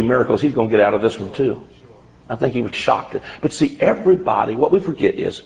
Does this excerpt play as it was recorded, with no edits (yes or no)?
no